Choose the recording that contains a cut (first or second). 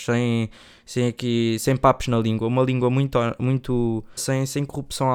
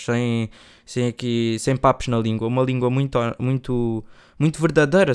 first